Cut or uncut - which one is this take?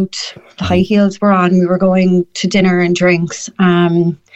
uncut